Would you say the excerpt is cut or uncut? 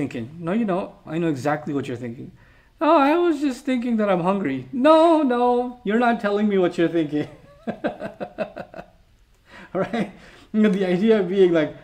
cut